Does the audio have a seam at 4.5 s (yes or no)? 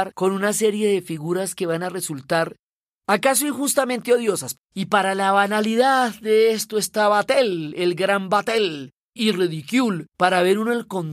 yes